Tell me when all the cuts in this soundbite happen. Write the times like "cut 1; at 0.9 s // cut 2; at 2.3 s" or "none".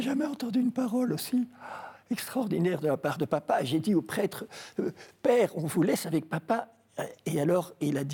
none